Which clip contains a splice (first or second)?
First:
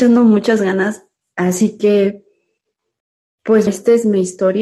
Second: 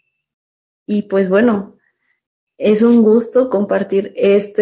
first